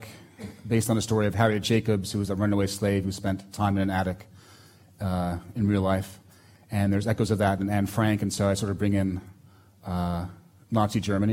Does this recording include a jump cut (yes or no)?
no